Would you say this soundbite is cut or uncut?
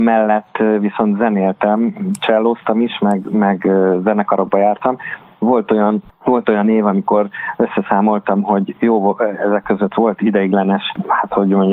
uncut